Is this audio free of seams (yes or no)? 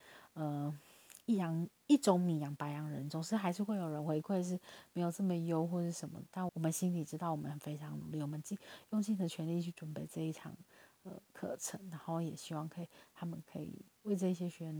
no